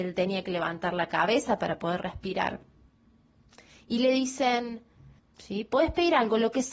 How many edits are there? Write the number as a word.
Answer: one